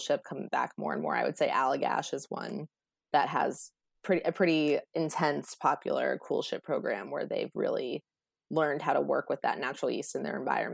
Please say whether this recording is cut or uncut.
uncut